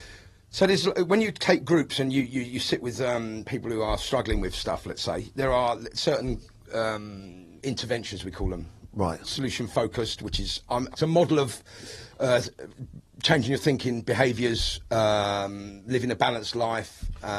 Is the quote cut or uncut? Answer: cut